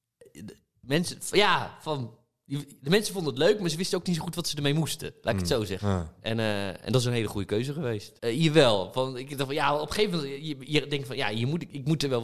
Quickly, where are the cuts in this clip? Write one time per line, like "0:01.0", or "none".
0:05.8
0:08.2